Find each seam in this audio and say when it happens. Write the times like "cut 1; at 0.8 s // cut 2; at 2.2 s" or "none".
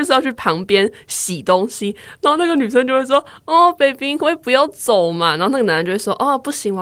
none